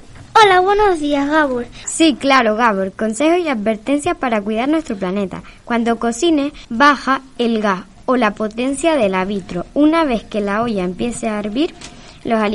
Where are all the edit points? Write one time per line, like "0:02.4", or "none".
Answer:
0:01.8
0:06.6